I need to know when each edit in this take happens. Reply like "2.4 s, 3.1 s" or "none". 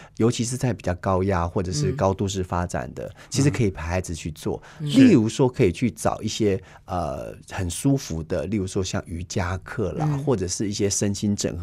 none